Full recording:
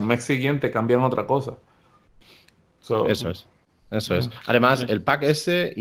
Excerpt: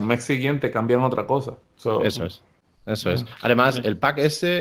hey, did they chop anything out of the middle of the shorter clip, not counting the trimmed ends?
yes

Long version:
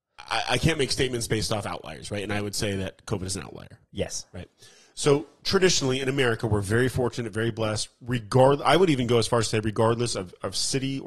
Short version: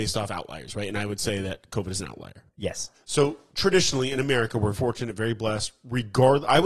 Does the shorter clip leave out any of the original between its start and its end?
yes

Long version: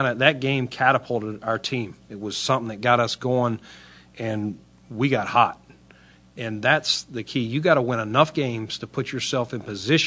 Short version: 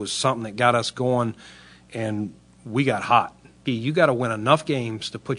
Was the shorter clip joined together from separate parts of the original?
yes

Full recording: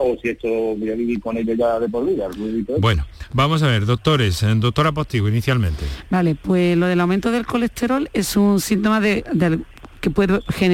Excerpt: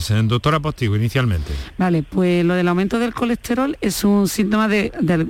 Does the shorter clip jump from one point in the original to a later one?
no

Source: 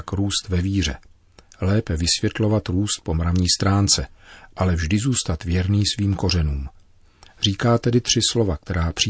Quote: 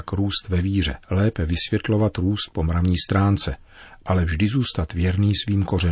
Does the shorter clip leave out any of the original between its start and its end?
yes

